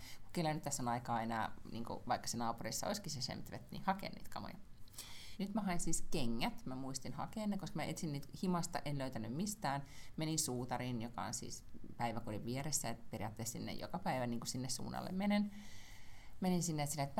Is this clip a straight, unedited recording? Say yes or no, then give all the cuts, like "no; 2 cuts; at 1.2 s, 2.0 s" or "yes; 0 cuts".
no; 1 cut; at 5.4 s